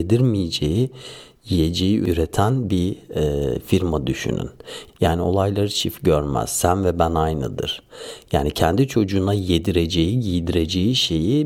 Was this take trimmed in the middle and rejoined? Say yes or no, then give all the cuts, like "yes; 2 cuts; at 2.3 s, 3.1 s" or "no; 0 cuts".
yes; 1 cut; at 4.9 s